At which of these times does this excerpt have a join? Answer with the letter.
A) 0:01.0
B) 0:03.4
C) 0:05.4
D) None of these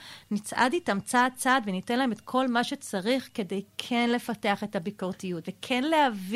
C